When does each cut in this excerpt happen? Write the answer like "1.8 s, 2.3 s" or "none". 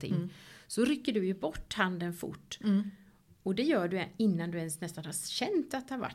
none

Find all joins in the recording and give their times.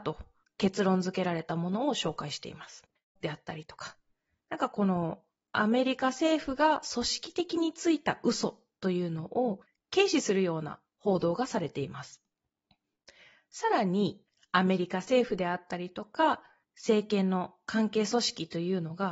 3.2 s

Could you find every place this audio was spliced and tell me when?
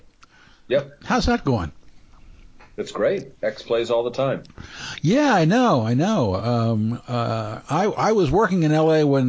none

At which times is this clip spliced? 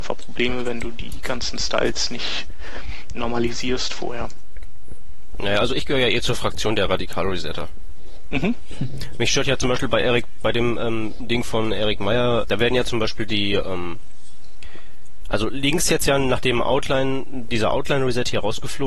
12.4 s

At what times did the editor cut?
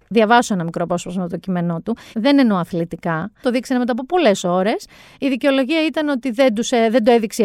2.1 s, 3.4 s

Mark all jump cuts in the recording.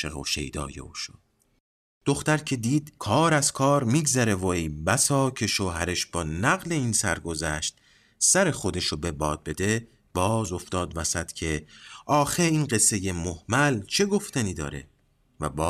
none

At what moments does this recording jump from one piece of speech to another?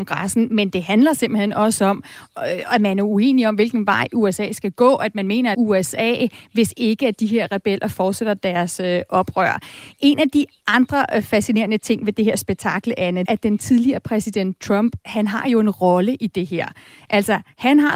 5.5 s, 13.3 s

